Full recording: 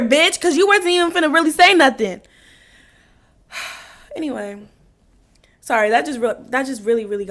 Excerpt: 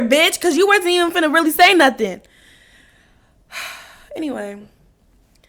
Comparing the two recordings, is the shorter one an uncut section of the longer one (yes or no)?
yes